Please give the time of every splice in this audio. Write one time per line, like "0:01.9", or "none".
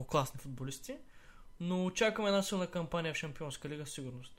0:01.6

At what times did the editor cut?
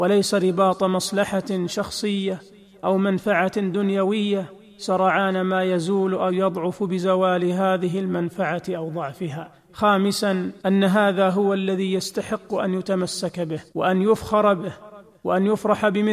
0:10.6
0:13.7

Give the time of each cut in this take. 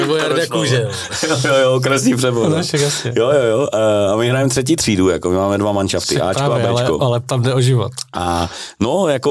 none

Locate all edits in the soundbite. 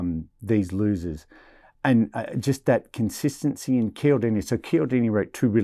none

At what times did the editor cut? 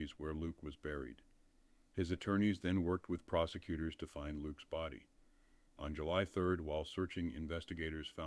none

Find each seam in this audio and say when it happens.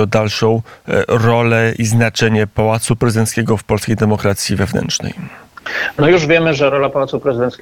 none

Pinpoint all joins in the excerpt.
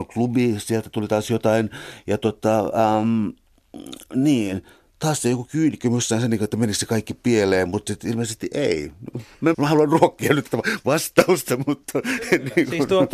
0:09.5

